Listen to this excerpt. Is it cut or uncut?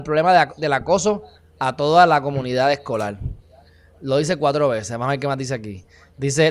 uncut